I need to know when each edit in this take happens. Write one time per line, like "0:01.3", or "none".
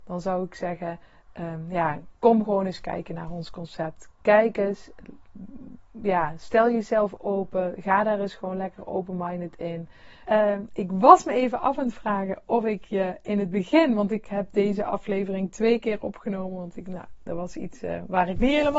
0:10.3